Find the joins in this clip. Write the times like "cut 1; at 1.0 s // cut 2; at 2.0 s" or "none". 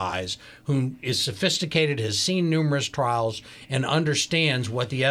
none